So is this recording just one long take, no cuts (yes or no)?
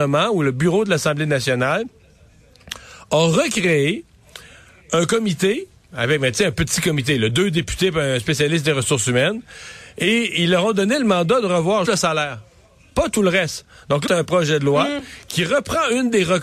no